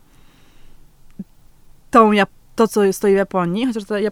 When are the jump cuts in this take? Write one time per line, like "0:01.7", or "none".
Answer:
0:02.4